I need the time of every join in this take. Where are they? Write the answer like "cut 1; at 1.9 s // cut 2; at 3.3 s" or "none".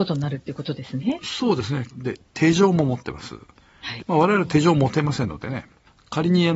cut 1; at 1.9 s // cut 2; at 4.0 s